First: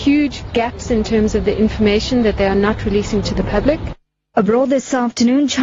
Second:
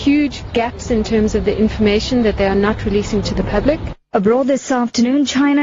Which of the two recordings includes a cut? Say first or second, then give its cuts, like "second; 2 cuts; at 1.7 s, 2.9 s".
second; 1 cut; at 4.0 s